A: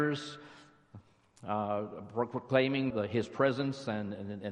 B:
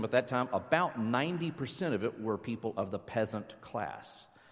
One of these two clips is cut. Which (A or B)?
A